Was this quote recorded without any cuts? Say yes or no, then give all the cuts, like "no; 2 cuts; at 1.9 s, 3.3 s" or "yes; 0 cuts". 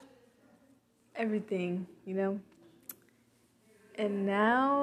yes; 0 cuts